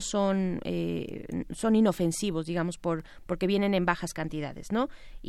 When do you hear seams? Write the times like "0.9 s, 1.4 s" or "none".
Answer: none

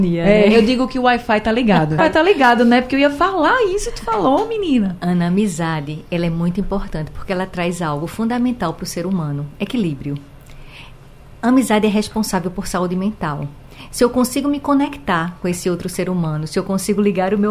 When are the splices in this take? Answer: 2.0 s

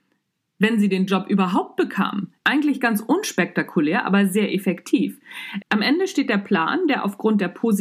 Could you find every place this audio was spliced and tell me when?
2.4 s, 5.6 s

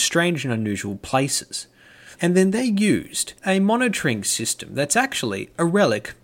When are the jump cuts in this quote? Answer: 2.2 s, 3.4 s

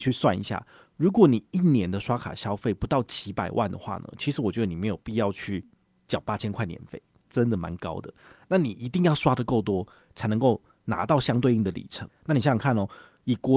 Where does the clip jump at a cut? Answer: 12.1 s

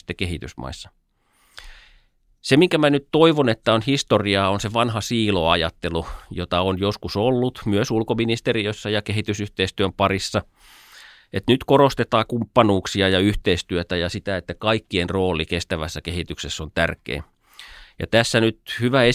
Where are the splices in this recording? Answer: none

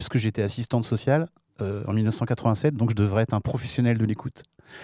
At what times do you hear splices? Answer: none

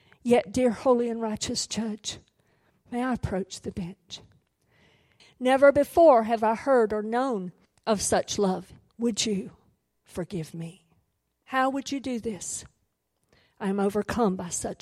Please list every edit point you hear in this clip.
5.2 s, 8.9 s, 11.4 s

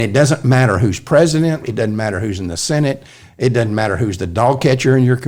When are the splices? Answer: 1.6 s

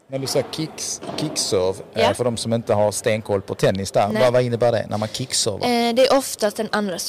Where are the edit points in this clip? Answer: none

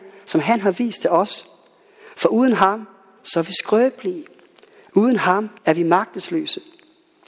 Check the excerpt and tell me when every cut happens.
5.6 s

